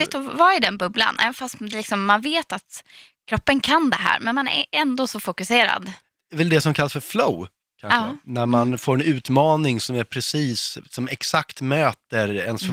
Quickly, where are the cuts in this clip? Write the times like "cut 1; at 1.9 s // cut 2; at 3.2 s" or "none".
none